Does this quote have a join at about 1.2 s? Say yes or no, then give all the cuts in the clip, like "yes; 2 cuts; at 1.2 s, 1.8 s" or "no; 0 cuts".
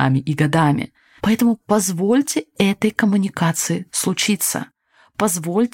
yes; 1 cut; at 1.2 s